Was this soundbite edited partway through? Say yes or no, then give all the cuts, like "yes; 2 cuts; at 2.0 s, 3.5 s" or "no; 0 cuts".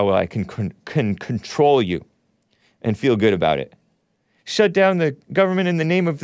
yes; 1 cut; at 4.4 s